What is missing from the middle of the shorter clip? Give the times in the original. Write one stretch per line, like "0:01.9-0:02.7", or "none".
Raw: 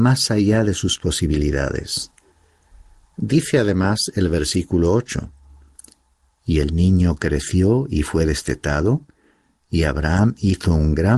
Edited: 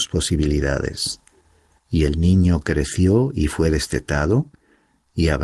0:02.7-0:06.3